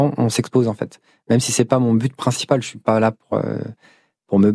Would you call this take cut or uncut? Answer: uncut